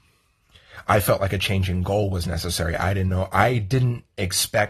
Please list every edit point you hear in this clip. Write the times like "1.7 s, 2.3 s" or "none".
none

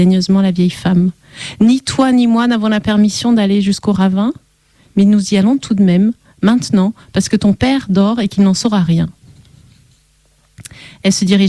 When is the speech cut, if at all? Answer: none

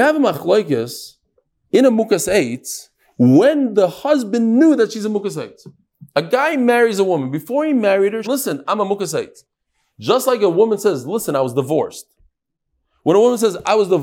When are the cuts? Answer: 8.2 s

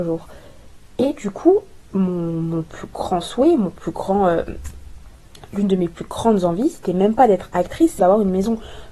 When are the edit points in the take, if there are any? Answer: 1.9 s, 8.0 s

